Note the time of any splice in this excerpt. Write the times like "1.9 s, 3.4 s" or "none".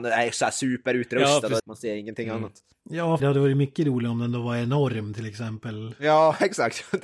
1.6 s, 3.2 s